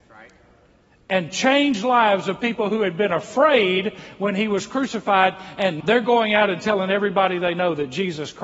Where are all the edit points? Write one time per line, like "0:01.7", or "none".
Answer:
0:05.8